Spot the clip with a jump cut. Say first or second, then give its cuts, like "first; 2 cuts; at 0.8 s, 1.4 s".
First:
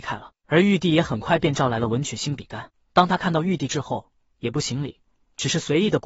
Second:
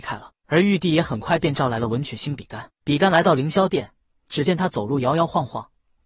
first; 1 cut; at 2.7 s